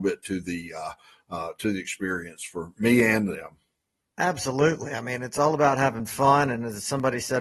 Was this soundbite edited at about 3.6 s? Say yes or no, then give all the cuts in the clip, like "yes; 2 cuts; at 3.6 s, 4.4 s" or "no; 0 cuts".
no; 0 cuts